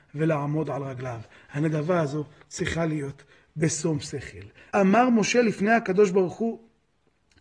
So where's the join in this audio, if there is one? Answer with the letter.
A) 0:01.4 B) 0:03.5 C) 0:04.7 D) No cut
C